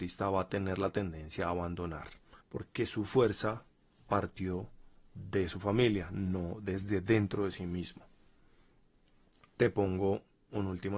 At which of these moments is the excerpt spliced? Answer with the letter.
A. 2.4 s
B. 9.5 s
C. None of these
A